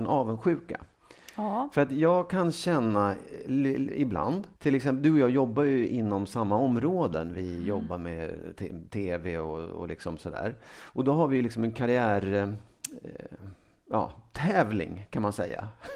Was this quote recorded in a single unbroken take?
no; 1 cut; at 4.5 s

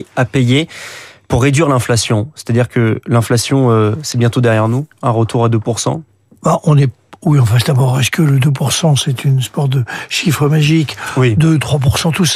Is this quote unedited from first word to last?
yes; 0 cuts

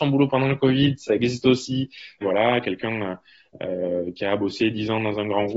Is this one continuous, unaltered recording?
no; 1 cut; at 2.2 s

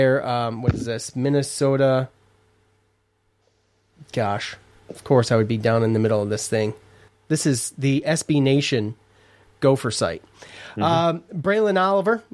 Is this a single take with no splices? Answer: no; 1 cut; at 7.1 s

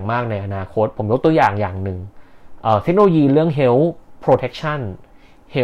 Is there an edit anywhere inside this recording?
no; 0 cuts

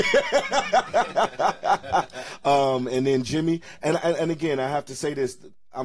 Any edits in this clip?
no; 0 cuts

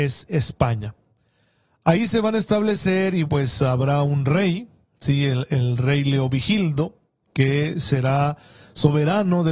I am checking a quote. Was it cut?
yes; 1 cut; at 3.3 s

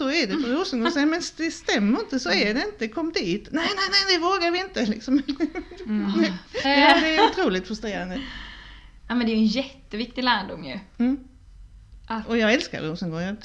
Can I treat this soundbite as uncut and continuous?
no; 1 cut; at 6.6 s

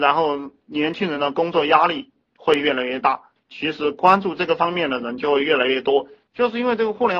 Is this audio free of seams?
no; 2 cuts; at 3.4 s, 6.3 s

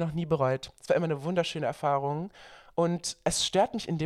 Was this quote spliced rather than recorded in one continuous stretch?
no; 0 cuts

